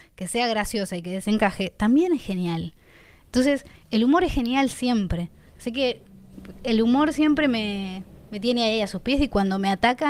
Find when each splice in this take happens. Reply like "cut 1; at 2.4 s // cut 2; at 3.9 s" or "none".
none